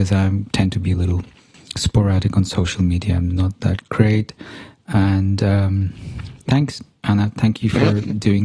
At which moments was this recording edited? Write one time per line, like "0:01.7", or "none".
0:06.4